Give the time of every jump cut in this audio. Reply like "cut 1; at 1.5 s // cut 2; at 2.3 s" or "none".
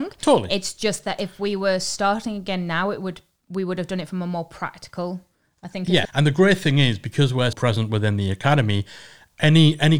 cut 1; at 6.1 s // cut 2; at 7.5 s